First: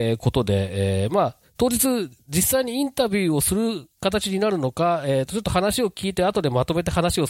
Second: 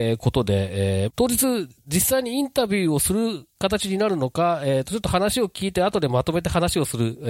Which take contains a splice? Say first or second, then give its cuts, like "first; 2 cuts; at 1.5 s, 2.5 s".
second; 1 cut; at 1.1 s